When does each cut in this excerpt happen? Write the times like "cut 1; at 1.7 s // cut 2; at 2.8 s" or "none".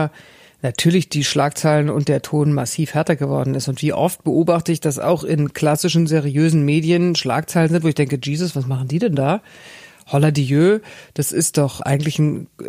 none